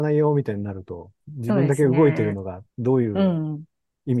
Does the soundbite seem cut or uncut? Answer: cut